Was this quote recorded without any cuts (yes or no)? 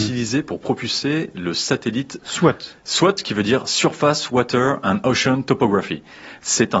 no